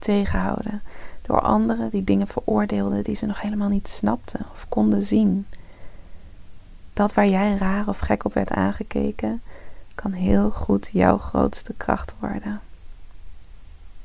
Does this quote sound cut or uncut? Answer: uncut